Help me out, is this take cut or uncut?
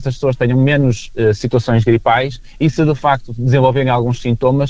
uncut